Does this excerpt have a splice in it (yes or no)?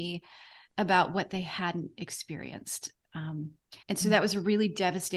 yes